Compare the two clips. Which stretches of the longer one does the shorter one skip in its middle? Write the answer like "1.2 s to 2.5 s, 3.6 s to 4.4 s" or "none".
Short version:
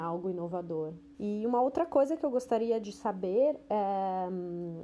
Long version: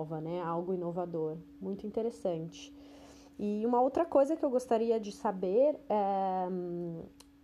1.6 s to 3.3 s